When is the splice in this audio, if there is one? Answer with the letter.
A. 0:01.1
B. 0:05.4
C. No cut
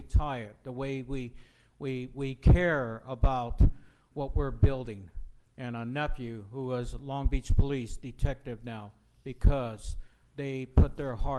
B